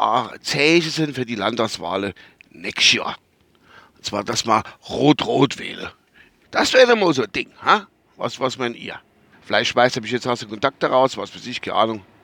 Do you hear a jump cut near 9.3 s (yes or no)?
yes